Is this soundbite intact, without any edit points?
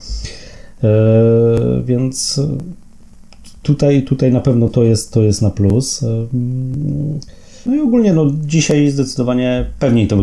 no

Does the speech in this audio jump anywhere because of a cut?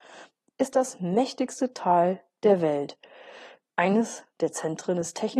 yes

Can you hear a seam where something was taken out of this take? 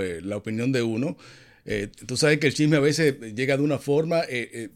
no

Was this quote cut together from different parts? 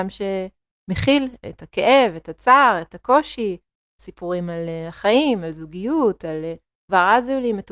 no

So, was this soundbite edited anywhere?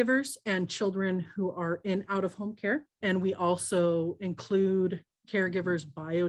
no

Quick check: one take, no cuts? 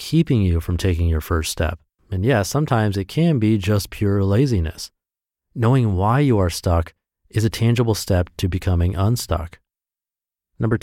no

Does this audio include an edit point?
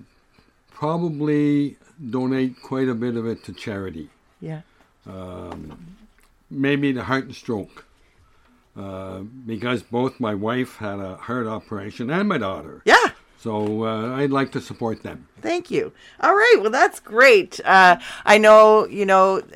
no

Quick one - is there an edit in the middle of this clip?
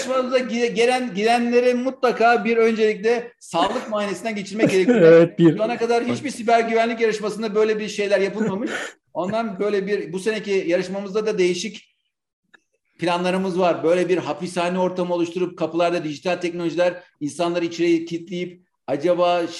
no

